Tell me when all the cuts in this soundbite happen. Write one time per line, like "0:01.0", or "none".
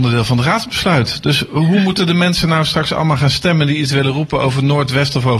none